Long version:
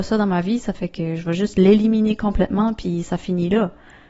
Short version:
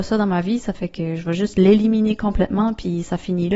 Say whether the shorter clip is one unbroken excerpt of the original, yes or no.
yes